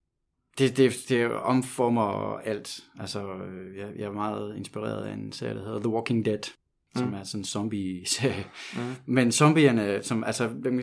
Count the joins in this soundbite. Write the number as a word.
zero